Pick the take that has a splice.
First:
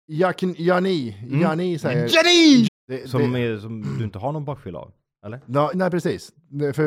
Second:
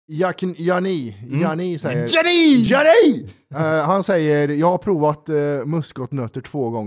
first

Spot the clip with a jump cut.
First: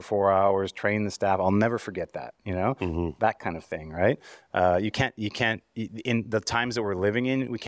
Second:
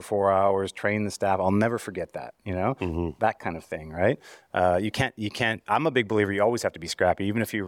second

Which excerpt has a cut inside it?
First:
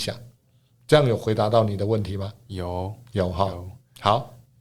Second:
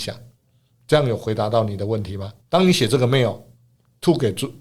second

